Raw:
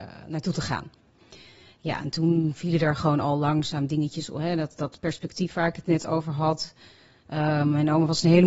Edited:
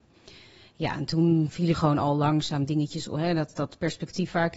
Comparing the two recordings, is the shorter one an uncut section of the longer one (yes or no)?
no